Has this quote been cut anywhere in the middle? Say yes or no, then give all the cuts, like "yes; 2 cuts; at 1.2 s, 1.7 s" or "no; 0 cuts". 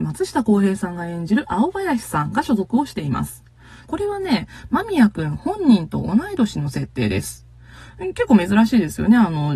yes; 1 cut; at 3.9 s